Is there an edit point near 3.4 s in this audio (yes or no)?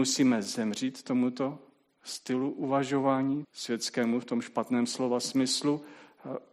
yes